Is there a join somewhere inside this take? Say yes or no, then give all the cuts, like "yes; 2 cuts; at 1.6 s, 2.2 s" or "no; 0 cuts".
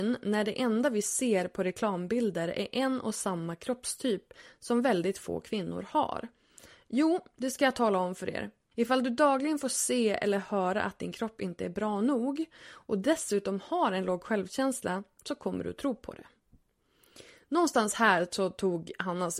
yes; 1 cut; at 8.7 s